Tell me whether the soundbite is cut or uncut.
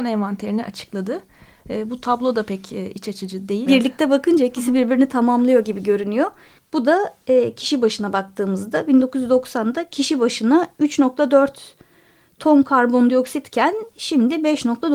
cut